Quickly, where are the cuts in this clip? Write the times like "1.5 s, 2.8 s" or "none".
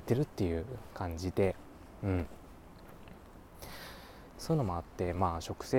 4.3 s